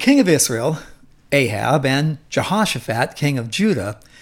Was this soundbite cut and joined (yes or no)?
no